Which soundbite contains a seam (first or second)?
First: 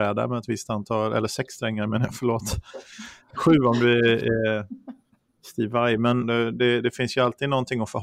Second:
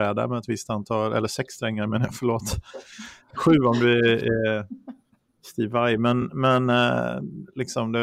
first